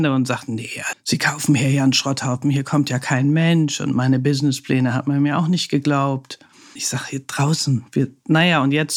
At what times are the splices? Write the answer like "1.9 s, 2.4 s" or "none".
0.9 s, 6.8 s